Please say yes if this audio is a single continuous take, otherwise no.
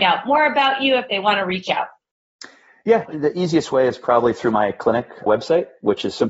no